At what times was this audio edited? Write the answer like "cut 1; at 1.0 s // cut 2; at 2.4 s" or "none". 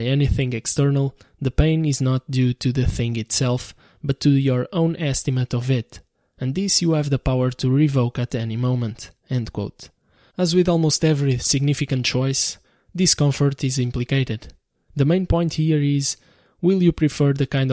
cut 1; at 10.3 s // cut 2; at 14.9 s